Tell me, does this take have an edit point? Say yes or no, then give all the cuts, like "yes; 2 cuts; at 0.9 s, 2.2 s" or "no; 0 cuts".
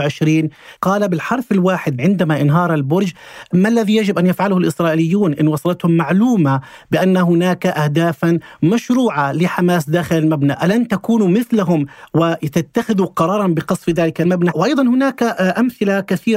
no; 0 cuts